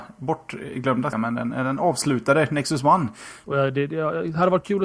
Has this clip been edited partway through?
yes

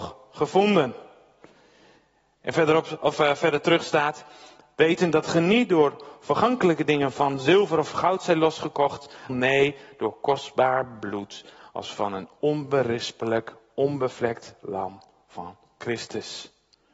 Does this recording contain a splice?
yes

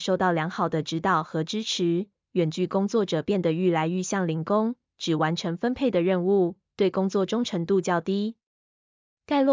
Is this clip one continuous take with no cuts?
yes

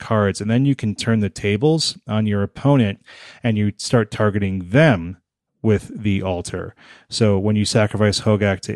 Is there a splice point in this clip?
no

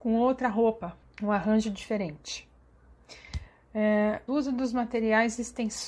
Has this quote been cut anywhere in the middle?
yes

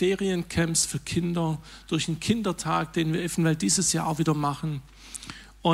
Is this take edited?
no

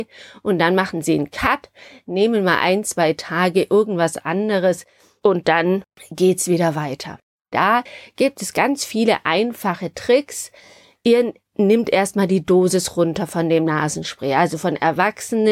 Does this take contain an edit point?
yes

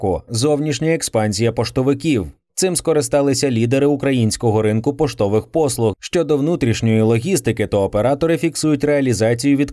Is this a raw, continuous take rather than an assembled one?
no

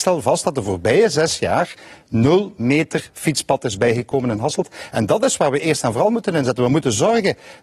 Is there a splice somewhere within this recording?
no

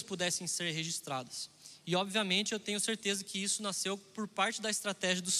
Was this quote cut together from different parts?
no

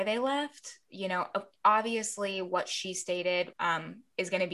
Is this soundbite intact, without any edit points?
no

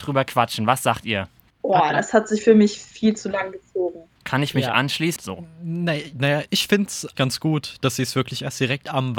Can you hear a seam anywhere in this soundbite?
yes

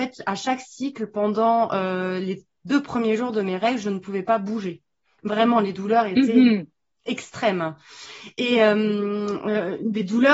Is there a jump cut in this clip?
no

